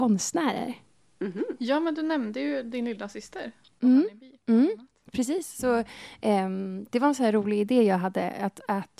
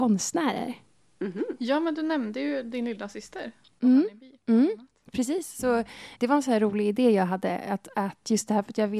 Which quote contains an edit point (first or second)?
second